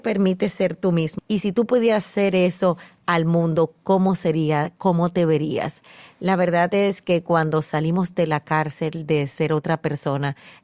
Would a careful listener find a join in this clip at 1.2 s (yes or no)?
yes